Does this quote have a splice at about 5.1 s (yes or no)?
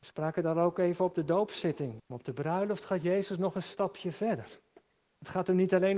no